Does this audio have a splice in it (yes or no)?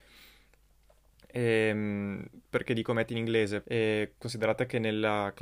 yes